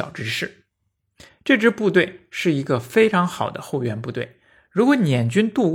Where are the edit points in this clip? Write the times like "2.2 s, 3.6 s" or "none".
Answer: 1.3 s